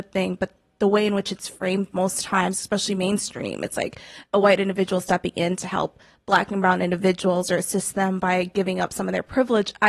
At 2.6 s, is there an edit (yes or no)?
no